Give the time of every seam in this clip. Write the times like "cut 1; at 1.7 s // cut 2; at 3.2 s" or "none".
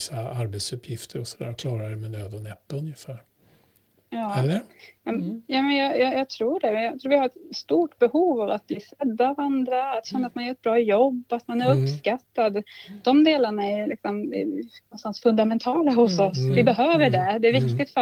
none